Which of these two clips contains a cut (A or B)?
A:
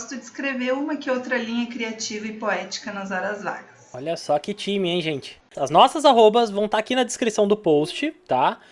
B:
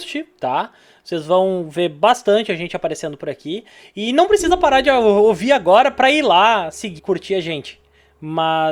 B